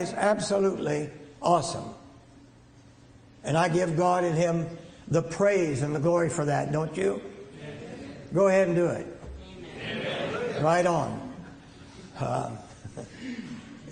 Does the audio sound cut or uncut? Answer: uncut